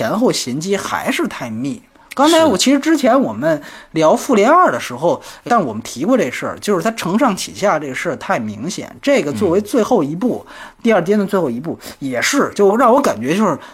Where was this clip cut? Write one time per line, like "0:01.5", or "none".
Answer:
0:05.5